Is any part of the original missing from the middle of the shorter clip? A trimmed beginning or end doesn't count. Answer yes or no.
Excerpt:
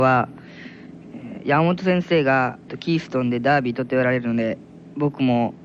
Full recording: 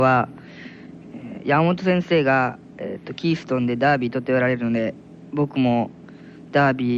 yes